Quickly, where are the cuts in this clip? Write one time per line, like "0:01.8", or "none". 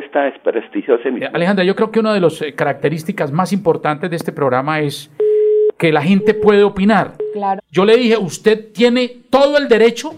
0:01.2
0:07.6